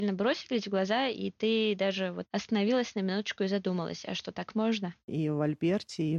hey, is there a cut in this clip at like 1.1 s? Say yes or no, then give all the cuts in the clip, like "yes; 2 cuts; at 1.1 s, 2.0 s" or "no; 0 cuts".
no; 1 cut; at 5.1 s